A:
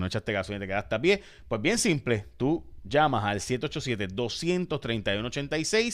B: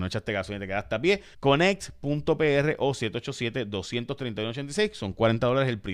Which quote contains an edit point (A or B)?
B